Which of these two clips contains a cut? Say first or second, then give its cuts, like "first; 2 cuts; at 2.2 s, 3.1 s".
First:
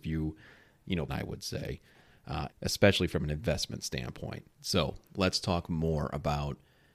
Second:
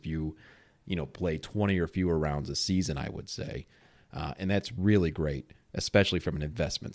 first; 3 cuts; at 1.1 s, 2.5 s, 4.5 s